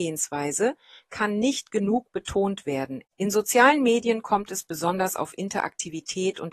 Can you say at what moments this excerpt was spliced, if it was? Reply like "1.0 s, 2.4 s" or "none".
3.0 s